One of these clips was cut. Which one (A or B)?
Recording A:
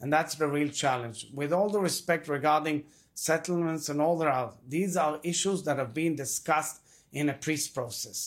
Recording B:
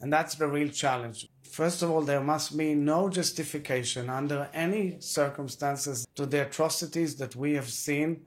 B